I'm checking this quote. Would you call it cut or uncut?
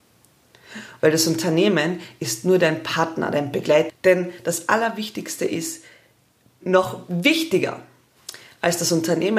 cut